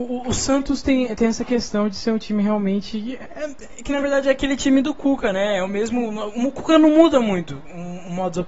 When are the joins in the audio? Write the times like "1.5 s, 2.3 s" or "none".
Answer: none